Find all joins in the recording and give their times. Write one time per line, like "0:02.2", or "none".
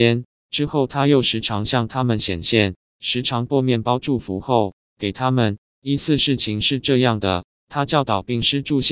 none